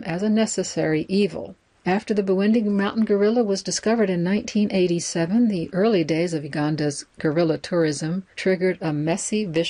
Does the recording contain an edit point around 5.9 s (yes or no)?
no